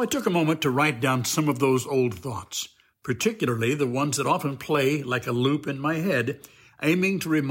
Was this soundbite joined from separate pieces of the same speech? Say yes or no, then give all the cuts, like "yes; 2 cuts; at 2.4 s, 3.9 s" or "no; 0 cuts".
no; 0 cuts